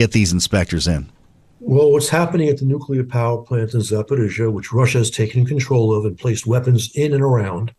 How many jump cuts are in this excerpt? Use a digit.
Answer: 0